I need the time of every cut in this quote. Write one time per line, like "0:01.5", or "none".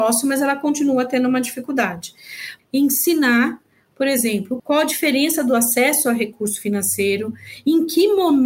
0:02.6
0:04.6